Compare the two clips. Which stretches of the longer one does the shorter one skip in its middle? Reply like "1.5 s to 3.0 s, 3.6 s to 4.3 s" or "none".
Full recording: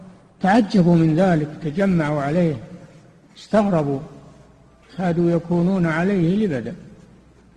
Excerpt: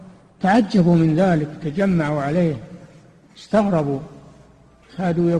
none